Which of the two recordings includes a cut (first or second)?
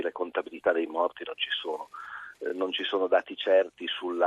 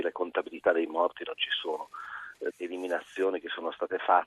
second